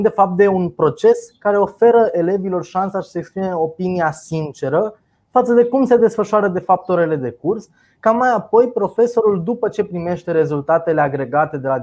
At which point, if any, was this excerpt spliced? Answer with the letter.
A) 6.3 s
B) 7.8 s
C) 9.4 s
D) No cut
D